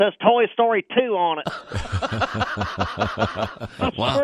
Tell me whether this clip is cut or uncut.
uncut